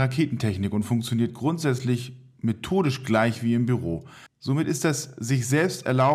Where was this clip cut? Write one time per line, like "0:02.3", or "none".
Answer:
0:04.3